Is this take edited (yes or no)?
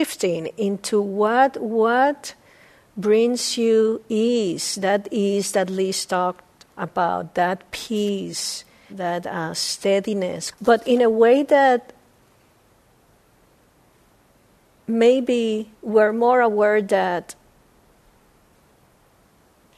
yes